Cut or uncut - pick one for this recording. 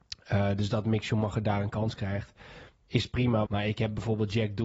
cut